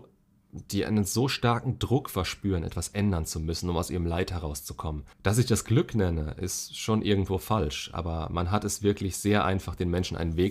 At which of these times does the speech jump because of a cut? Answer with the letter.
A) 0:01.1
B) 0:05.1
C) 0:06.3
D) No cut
B